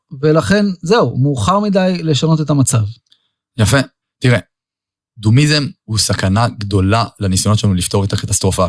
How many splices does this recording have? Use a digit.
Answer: 1